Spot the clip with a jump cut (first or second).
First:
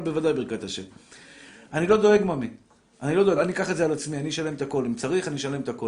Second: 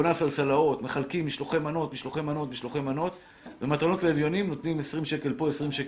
first